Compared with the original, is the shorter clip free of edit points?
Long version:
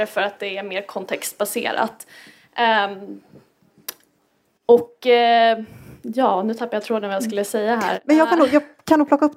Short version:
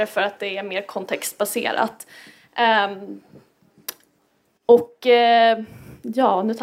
yes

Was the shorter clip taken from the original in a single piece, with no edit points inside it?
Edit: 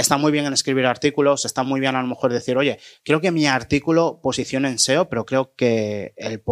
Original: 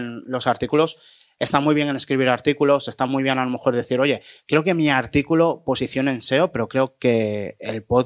yes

